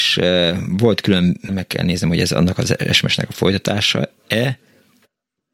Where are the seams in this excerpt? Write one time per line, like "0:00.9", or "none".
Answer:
0:01.5